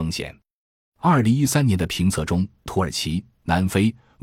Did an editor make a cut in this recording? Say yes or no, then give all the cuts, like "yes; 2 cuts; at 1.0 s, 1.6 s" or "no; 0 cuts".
yes; 1 cut; at 2.7 s